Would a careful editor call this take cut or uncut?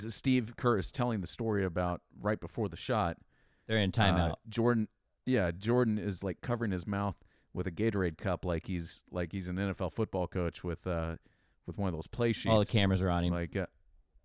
uncut